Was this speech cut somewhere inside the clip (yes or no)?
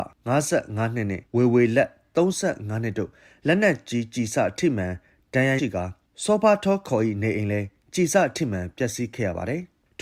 yes